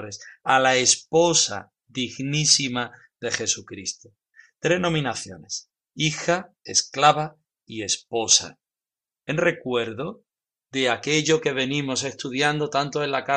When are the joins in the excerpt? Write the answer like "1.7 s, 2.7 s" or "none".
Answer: 6.6 s